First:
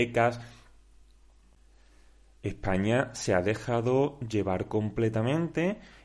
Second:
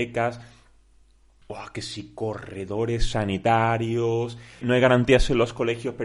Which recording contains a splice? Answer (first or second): second